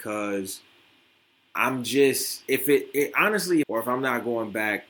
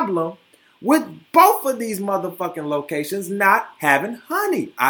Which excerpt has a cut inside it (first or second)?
first